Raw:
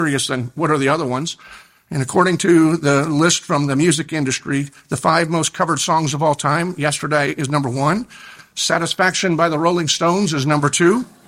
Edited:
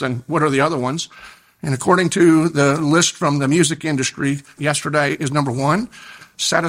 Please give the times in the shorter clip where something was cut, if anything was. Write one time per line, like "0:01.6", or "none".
0:04.6